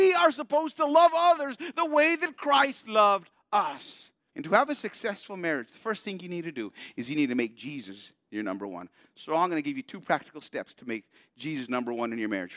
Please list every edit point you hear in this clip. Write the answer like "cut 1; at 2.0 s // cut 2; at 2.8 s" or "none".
cut 1; at 4.3 s